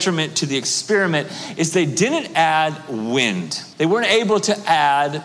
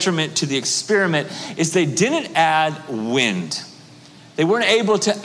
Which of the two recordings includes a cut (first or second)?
first